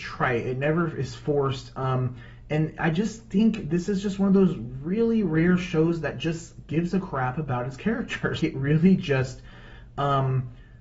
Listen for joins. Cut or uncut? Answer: cut